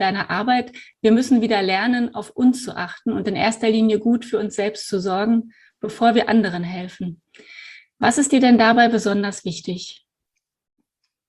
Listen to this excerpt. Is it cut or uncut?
uncut